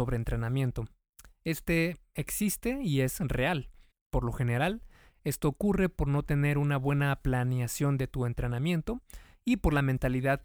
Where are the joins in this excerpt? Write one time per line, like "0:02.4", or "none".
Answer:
0:03.9